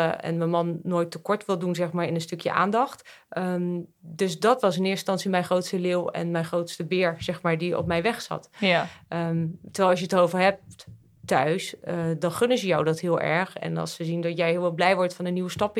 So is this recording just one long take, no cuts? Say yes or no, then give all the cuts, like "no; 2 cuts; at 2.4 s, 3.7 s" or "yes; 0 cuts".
yes; 0 cuts